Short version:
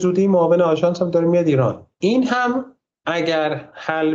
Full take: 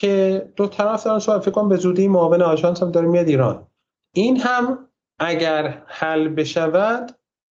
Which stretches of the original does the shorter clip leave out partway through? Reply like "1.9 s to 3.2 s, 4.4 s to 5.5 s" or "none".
3.7 s to 4.1 s

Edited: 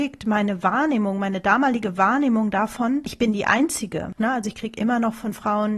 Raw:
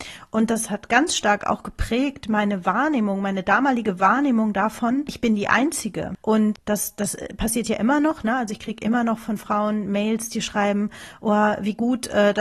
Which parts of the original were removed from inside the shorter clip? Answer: 6.2 s to 8.2 s

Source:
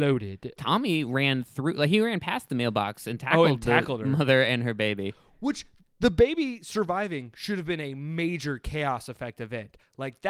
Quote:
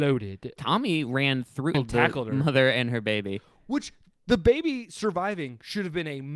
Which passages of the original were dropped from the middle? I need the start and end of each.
1.7 s to 3.5 s

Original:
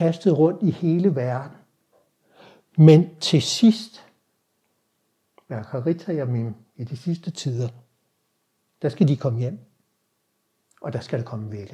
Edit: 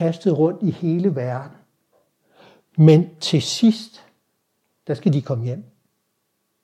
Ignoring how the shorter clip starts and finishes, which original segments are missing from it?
4.8 s to 8.8 s

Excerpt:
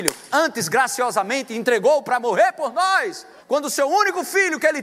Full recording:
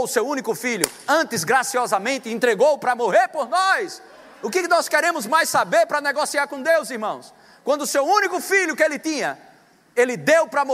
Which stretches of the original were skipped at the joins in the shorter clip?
4.2 s to 7.6 s

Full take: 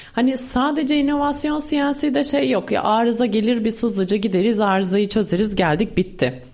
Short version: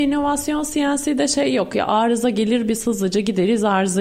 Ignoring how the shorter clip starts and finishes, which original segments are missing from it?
none

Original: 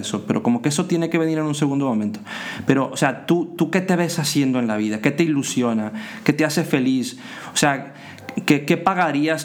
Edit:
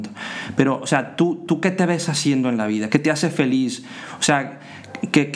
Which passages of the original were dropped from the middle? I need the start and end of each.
5.0 s to 6.2 s

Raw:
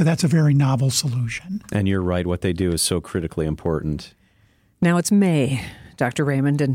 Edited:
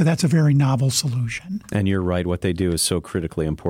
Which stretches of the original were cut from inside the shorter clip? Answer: none

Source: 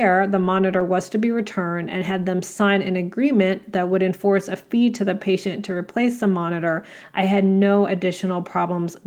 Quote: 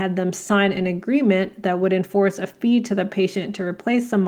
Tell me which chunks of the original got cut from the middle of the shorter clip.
none

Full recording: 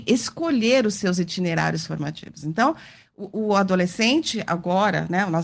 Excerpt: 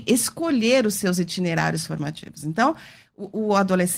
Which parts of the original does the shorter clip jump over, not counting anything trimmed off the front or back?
none

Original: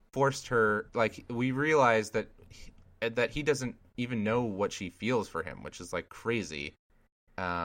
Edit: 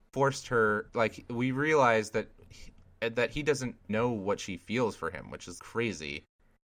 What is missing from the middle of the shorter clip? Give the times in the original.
3.9 s to 4.2 s, 5.9 s to 6.1 s

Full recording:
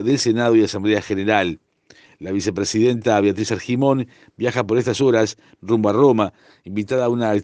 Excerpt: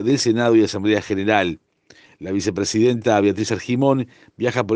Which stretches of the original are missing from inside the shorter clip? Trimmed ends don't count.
none

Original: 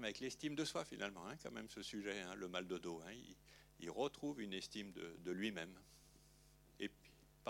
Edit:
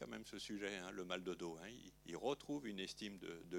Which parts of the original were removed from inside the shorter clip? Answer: 3.4 s to 3.7 s

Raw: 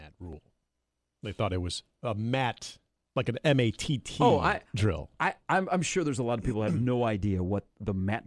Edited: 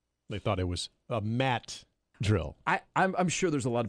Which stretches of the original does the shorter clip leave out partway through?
3.1 s to 4.7 s

